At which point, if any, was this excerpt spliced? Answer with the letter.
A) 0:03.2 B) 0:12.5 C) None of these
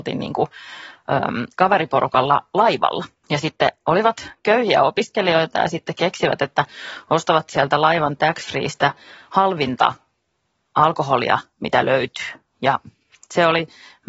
A